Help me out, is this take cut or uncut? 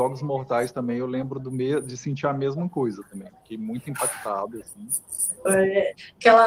cut